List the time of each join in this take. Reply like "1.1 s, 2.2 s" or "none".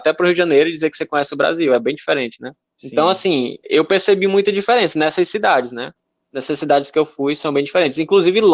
3.6 s